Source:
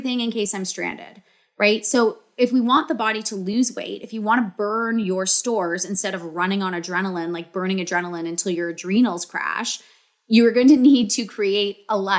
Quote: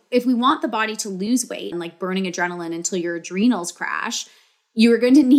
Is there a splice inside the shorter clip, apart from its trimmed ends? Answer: yes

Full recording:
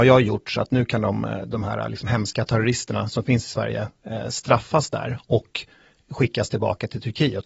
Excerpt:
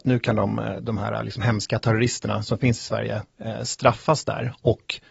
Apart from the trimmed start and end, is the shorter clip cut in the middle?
no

